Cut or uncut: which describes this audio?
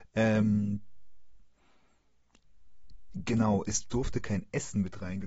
uncut